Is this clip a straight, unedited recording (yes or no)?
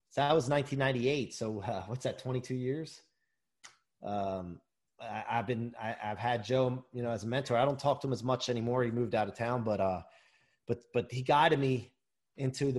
yes